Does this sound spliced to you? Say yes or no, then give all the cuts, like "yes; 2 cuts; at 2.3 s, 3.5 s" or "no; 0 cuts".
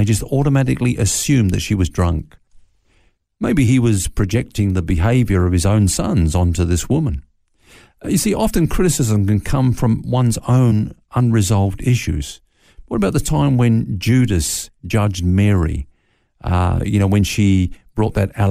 no; 0 cuts